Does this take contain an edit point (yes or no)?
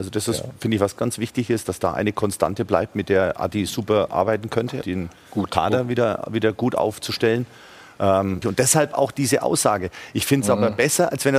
yes